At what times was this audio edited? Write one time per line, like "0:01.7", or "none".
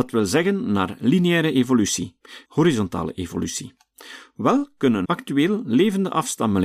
0:02.5
0:05.0